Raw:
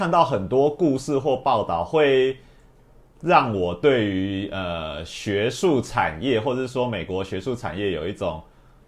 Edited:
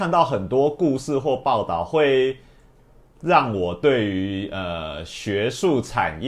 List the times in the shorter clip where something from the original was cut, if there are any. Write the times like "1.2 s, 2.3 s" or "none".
none

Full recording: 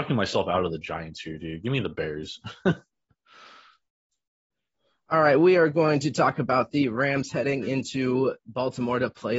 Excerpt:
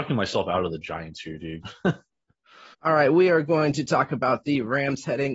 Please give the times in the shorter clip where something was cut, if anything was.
1.6 s, 2.7 s

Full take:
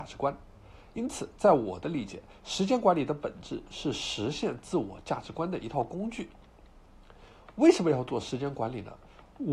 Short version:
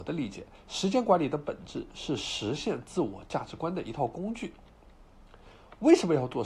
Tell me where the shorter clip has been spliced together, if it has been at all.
none

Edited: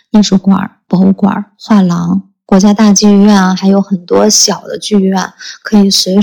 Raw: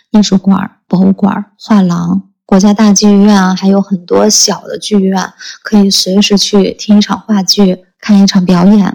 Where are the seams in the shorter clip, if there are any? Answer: none

